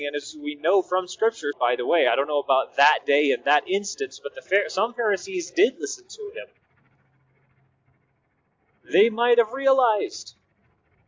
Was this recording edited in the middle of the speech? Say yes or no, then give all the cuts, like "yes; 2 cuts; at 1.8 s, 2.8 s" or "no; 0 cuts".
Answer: yes; 1 cut; at 1.5 s